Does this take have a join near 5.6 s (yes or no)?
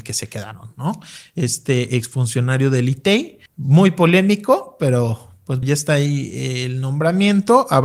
yes